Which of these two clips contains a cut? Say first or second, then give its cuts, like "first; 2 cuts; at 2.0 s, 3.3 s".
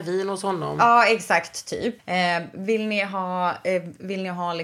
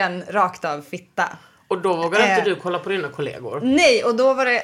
first; 1 cut; at 2.0 s